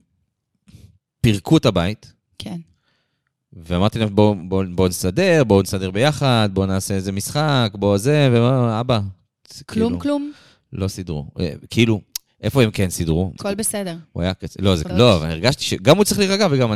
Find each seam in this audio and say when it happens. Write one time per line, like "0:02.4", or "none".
0:13.4
0:14.9